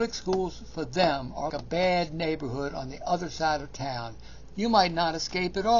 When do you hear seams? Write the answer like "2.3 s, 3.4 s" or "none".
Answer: 1.5 s, 4.5 s